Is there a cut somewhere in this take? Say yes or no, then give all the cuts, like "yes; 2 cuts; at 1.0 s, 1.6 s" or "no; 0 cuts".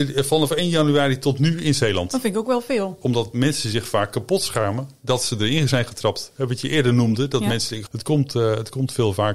yes; 2 cuts; at 3.0 s, 7.9 s